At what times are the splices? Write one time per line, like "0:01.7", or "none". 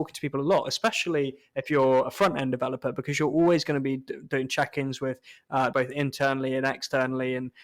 0:05.7